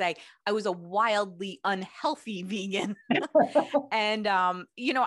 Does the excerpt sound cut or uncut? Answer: uncut